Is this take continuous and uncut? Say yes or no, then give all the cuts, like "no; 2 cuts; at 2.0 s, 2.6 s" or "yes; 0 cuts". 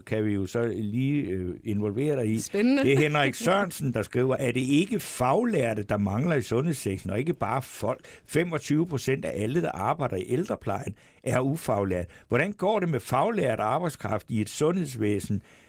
yes; 0 cuts